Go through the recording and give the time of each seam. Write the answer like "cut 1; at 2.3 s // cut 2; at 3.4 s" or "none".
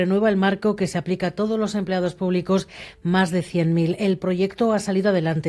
none